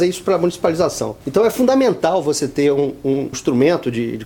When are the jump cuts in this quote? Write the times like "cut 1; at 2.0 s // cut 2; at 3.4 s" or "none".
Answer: cut 1; at 1.2 s // cut 2; at 3.3 s